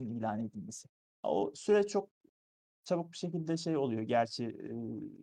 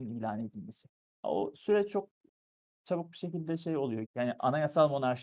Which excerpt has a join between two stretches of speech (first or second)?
second